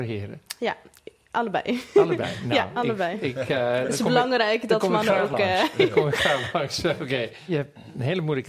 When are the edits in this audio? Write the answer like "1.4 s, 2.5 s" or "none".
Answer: none